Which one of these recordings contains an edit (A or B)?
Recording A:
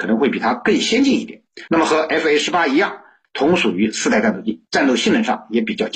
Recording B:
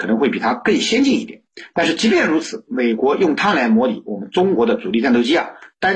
A